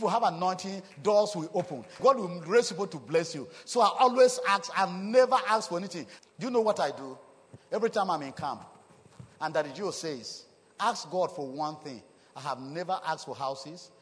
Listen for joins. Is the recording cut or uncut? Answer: cut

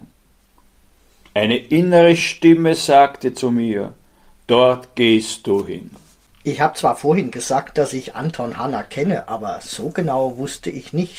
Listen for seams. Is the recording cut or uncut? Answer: uncut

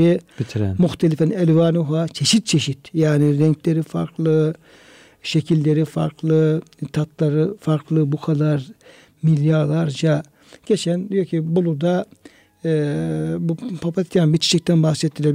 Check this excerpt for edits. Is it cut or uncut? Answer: uncut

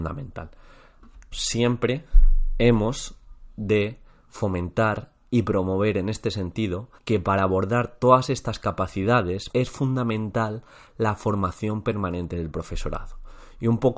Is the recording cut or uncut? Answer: cut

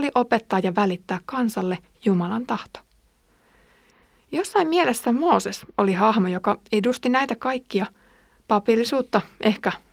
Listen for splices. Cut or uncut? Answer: uncut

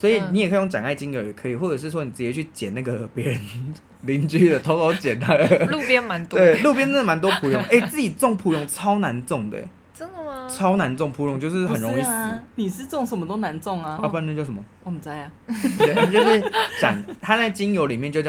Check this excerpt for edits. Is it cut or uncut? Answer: cut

